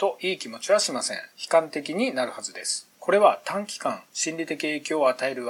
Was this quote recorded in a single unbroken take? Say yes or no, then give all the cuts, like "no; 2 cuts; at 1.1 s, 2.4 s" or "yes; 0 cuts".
yes; 0 cuts